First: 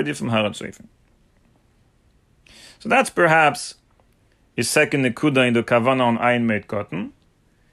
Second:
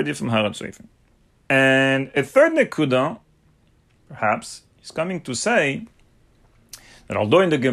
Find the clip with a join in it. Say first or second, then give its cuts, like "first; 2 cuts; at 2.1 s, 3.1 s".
second; 2 cuts; at 1.3 s, 4.0 s